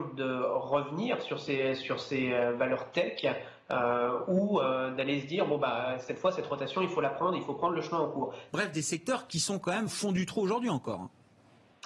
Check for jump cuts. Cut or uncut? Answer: cut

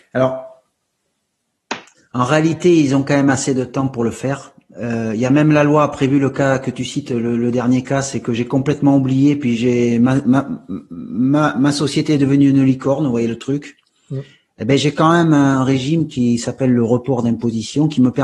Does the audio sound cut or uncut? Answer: uncut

